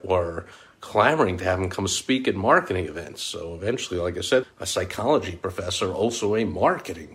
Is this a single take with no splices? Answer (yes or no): no